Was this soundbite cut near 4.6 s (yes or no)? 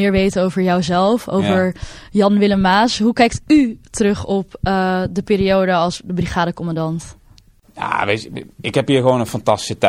no